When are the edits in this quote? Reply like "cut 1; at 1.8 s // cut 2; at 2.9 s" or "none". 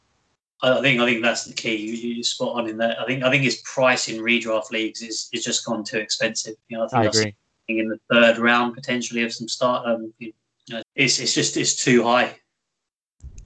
cut 1; at 10.8 s